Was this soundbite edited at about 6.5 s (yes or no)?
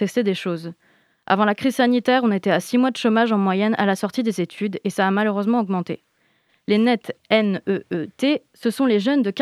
yes